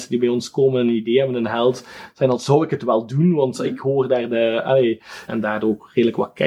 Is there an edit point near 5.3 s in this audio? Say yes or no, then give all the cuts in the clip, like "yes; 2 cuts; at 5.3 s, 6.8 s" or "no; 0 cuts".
yes; 1 cut; at 5.3 s